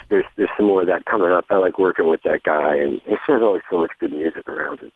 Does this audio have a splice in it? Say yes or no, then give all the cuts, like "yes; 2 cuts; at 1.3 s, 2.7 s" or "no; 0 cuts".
yes; 1 cut; at 3.0 s